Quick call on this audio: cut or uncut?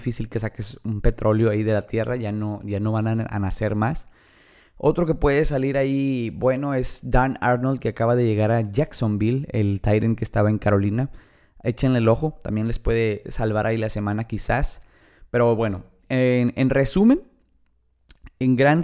uncut